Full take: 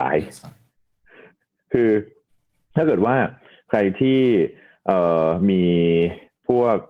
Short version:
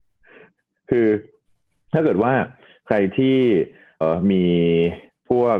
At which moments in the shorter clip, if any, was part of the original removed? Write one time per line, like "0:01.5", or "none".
0:04.0